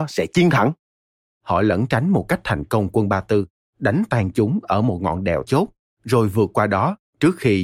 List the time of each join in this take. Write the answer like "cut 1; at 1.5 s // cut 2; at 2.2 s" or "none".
cut 1; at 1.3 s // cut 2; at 5.5 s